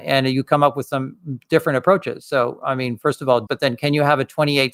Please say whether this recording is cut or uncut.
cut